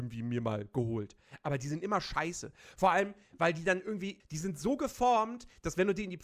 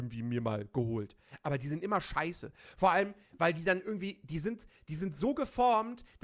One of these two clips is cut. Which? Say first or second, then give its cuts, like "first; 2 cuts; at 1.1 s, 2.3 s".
first; 1 cut; at 4.2 s